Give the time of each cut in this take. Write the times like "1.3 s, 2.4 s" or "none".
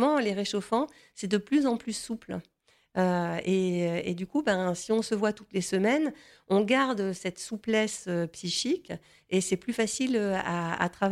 none